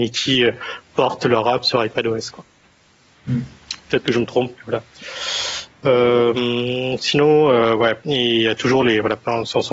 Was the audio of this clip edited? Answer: no; 0 cuts

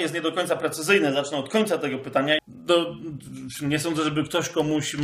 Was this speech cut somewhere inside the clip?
yes; 1 cut; at 2.4 s

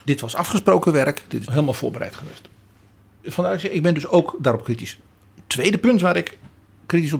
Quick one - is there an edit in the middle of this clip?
yes; 2 cuts; at 1.4 s, 3.2 s

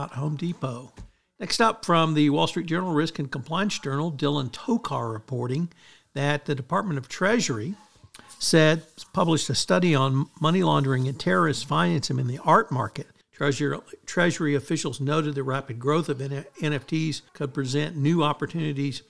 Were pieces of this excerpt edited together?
yes; 3 cuts; at 1.4 s, 13.2 s, 17.3 s

